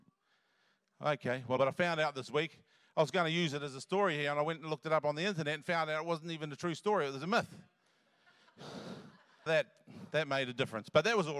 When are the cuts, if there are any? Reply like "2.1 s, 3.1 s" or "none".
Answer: 1.6 s, 9.5 s